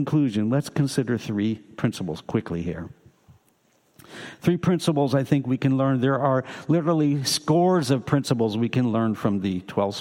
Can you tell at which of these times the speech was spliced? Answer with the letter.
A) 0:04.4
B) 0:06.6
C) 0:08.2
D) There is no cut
D